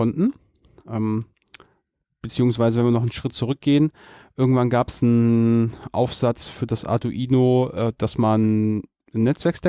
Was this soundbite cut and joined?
no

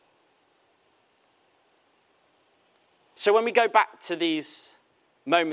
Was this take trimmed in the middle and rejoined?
no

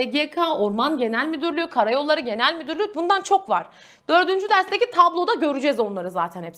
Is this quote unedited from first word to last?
yes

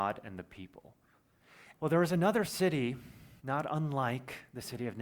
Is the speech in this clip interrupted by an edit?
yes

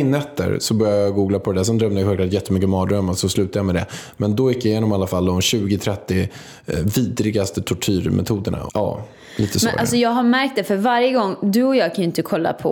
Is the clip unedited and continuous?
no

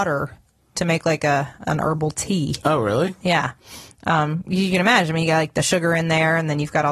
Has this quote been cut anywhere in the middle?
no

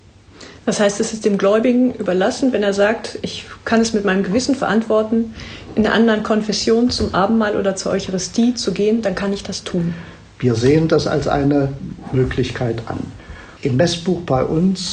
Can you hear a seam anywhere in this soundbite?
yes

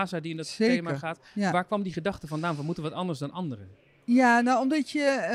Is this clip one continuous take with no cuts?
yes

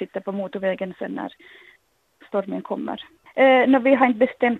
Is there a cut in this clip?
yes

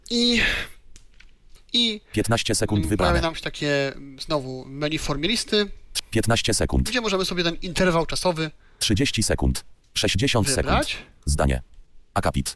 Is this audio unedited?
no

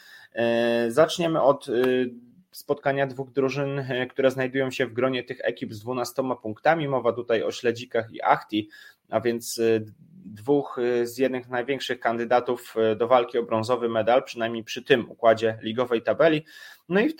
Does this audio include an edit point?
no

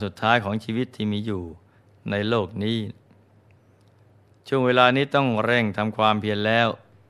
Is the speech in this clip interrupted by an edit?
no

